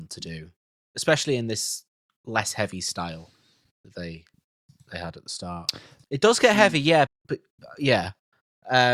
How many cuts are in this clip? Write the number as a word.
two